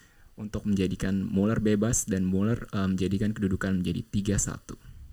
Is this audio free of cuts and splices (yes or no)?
yes